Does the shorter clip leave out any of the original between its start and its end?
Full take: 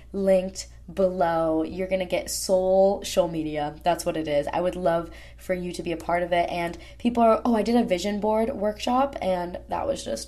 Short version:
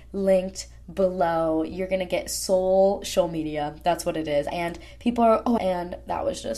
yes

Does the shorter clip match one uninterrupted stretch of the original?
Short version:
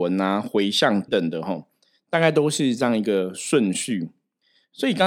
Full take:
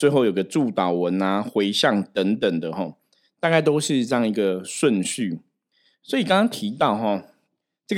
no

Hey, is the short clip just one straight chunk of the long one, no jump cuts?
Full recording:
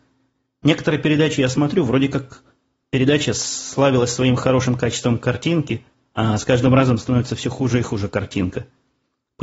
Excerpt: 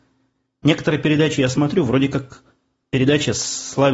yes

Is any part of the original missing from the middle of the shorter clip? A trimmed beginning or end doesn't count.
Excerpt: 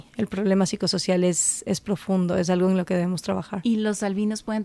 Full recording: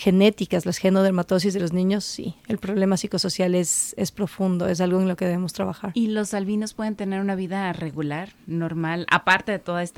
no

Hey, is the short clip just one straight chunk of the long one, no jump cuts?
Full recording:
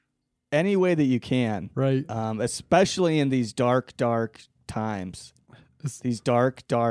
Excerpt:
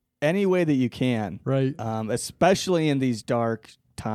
no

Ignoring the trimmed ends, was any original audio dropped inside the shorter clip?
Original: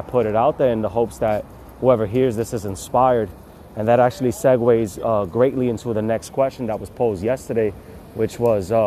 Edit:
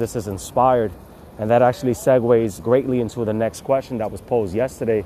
yes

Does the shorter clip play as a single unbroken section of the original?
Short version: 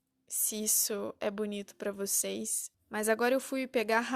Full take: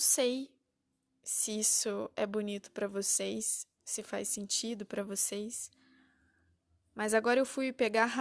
no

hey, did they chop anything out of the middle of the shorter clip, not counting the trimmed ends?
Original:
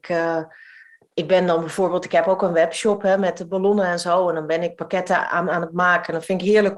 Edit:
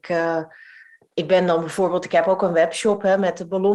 no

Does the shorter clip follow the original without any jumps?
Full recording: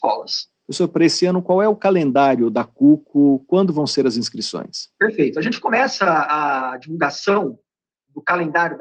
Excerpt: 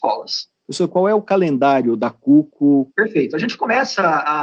no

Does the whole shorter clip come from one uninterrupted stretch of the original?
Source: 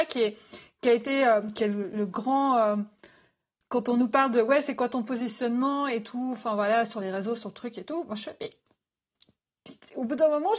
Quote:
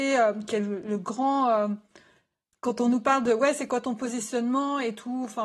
yes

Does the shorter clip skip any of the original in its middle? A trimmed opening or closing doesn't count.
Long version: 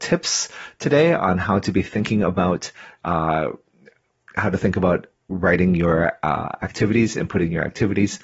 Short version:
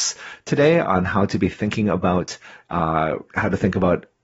yes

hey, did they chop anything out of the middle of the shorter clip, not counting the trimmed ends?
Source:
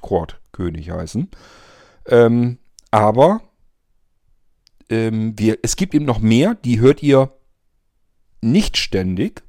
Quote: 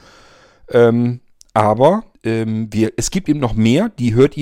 yes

